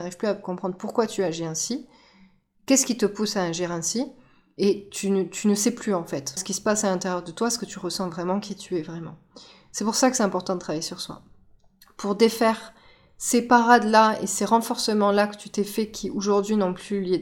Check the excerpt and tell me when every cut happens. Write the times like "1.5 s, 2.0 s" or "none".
6.4 s